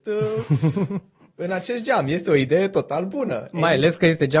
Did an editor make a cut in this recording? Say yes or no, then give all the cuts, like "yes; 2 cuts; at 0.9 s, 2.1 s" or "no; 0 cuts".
no; 0 cuts